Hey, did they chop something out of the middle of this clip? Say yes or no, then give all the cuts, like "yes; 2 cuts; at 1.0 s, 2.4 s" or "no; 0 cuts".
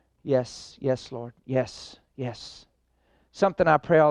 no; 0 cuts